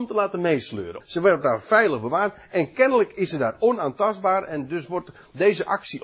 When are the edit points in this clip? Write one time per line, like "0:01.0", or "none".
0:01.0